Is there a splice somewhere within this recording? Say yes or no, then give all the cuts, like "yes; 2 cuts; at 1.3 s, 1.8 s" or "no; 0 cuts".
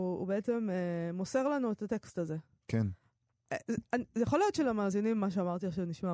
no; 0 cuts